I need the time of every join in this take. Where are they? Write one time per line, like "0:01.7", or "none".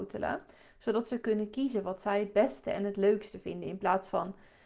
none